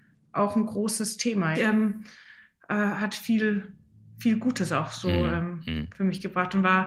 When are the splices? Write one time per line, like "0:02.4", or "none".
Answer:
0:01.5